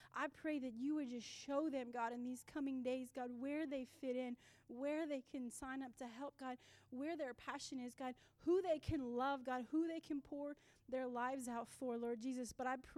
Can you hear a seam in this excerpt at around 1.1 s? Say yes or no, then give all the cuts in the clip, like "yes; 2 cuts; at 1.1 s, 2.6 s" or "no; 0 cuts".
no; 0 cuts